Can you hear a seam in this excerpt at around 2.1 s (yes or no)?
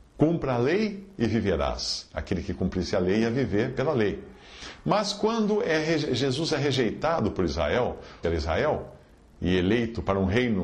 no